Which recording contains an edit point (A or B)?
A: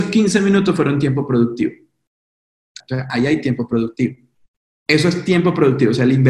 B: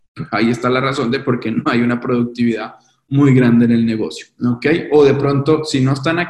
A